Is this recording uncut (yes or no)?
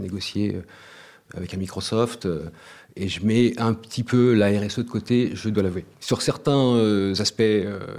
no